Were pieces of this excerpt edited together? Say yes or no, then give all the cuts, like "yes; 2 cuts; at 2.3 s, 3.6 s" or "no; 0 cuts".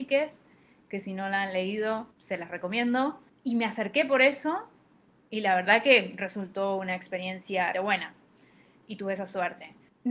yes; 3 cuts; at 2.1 s, 3.3 s, 7.7 s